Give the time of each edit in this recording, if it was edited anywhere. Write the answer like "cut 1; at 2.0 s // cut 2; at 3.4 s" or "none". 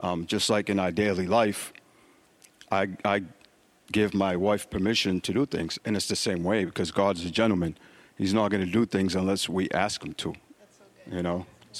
cut 1; at 5.8 s